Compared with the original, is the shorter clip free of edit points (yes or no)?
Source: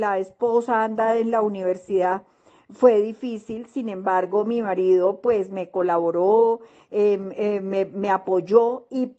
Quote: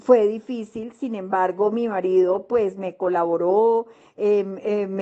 yes